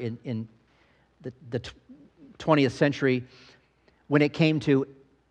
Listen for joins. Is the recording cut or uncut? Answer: uncut